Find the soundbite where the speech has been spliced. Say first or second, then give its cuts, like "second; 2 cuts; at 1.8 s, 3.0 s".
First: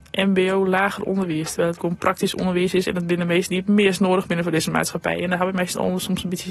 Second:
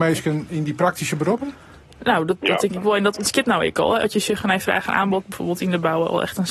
second; 1 cut; at 5.2 s